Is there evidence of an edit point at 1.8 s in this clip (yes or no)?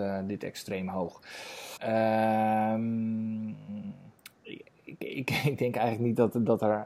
yes